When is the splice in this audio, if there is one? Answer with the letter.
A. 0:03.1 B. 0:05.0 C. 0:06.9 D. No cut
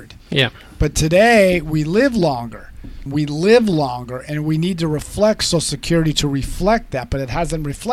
A